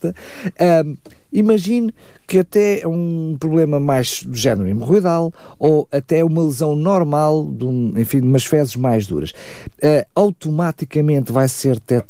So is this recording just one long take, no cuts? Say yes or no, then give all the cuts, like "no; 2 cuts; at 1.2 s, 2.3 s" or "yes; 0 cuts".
yes; 0 cuts